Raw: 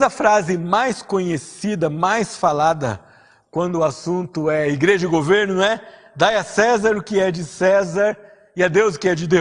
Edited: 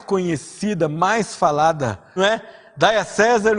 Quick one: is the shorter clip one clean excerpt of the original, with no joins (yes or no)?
no